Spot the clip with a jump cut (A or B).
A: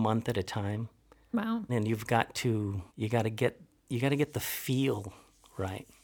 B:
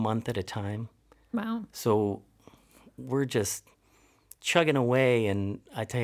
A